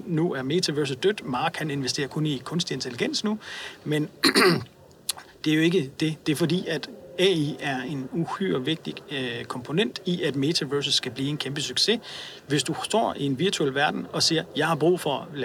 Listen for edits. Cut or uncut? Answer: uncut